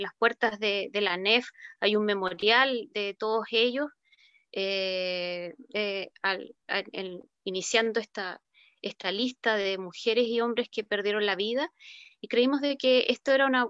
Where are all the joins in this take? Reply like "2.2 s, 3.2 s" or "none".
5.7 s